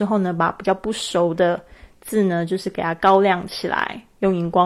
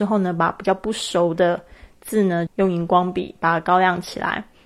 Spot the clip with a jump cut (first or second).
second